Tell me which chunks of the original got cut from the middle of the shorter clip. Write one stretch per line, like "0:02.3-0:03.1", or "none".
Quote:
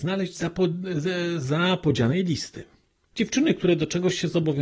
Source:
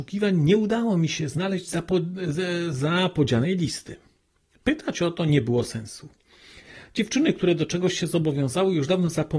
0:04.5-0:06.9